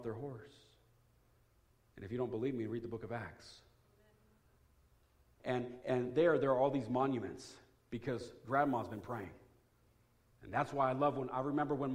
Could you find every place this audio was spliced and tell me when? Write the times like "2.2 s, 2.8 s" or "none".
5.4 s, 10.3 s